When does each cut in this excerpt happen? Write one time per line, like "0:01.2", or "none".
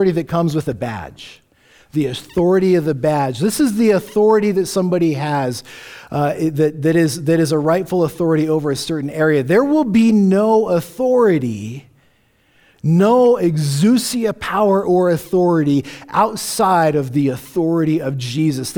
none